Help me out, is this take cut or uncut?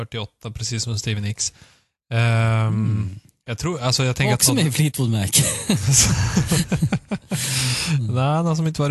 uncut